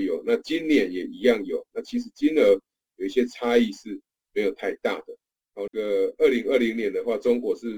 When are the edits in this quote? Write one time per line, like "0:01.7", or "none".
0:05.7